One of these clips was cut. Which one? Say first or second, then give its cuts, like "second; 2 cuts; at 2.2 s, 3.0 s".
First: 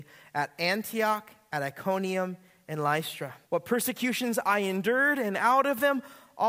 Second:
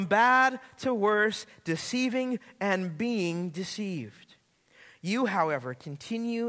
first; 1 cut; at 3.5 s